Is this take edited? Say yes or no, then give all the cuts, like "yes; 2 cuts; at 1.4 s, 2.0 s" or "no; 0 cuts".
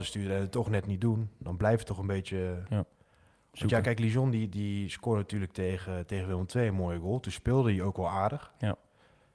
no; 0 cuts